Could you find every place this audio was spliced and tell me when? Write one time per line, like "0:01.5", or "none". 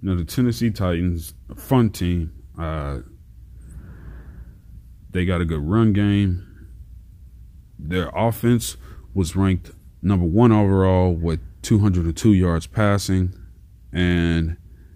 none